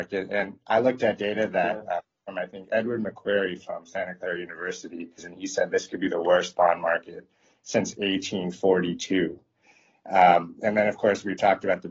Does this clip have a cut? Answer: yes; 1 cut; at 5.2 s

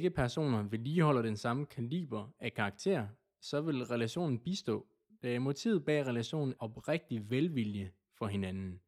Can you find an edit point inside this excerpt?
yes; 1 cut; at 6.6 s

